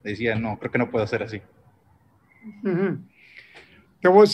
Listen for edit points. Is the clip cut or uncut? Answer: uncut